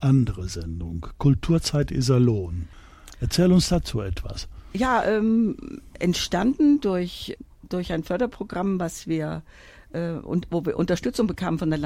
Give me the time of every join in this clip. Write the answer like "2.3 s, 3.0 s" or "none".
none